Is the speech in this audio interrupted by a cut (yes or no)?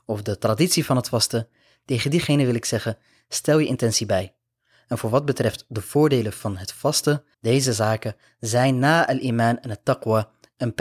yes